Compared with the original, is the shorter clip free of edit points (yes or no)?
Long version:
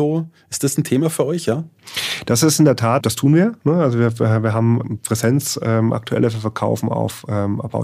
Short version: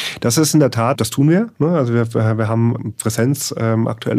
yes